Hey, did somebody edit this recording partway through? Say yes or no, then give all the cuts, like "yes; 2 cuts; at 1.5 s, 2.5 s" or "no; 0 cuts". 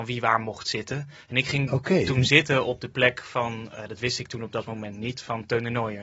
no; 0 cuts